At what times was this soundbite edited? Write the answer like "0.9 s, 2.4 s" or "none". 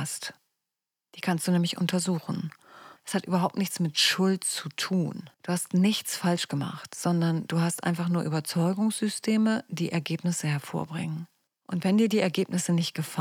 3.0 s, 5.3 s, 11.5 s